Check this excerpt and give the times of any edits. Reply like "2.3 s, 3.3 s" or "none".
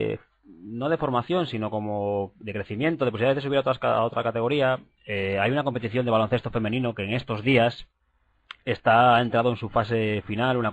none